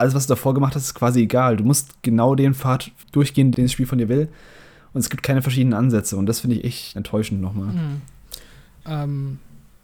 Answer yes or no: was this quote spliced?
yes